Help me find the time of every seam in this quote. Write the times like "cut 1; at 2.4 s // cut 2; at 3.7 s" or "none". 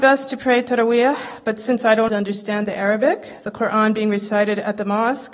cut 1; at 2.1 s

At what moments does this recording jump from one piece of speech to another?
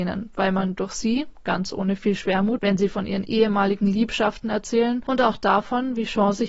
cut 1; at 2.6 s

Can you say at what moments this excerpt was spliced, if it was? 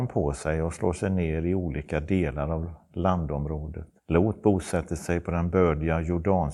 cut 1; at 4.0 s

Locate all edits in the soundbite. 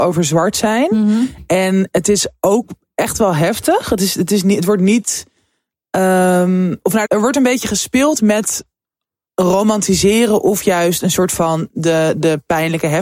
cut 1; at 7.1 s

